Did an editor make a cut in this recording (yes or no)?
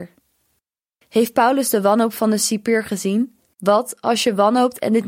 yes